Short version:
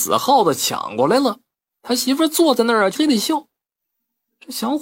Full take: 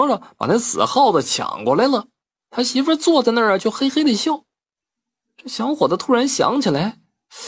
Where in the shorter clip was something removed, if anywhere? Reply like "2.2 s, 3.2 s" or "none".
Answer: 2.9 s